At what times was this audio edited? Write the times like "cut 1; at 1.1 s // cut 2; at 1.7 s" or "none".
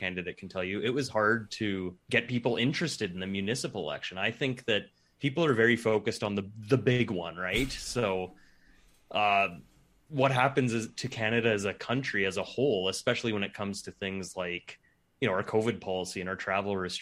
cut 1; at 2.0 s